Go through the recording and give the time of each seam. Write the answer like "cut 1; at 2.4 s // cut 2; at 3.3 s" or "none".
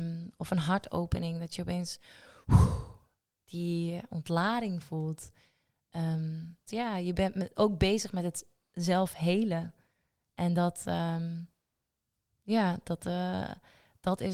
cut 1; at 6.7 s

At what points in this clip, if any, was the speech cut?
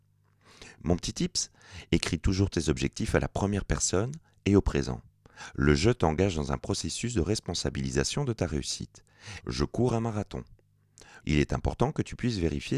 cut 1; at 9.4 s // cut 2; at 11.2 s

